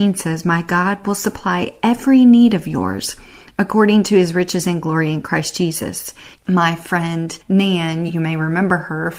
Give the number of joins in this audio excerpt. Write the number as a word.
two